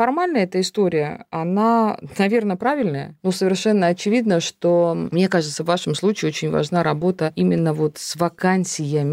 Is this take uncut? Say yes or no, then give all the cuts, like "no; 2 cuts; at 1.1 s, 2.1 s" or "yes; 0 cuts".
yes; 0 cuts